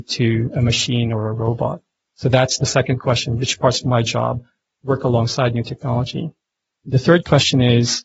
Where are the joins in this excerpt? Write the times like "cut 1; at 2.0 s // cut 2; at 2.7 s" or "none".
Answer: none